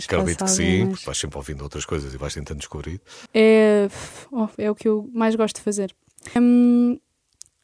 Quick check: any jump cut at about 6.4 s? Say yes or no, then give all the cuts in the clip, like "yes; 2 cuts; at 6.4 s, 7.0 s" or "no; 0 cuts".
yes; 3 cuts; at 3.3 s, 4.6 s, 6.4 s